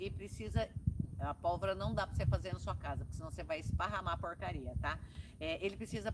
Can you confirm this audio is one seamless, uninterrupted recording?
yes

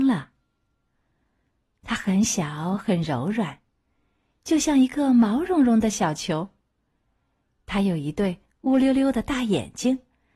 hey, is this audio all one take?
yes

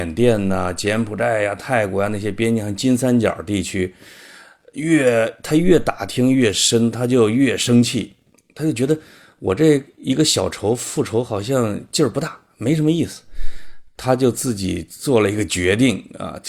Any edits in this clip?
no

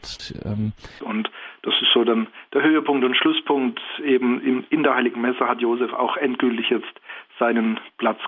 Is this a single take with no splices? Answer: no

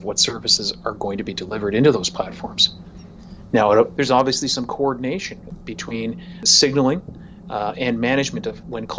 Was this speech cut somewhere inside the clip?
yes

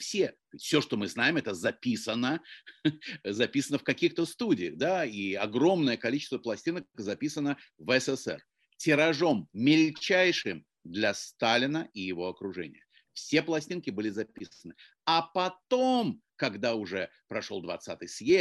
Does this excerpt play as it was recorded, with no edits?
yes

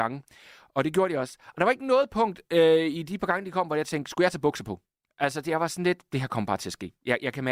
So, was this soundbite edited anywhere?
no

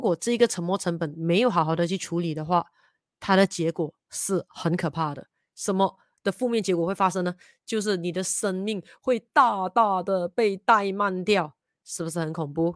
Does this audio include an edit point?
no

